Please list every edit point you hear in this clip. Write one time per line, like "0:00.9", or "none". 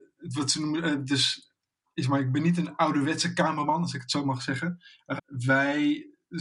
0:05.2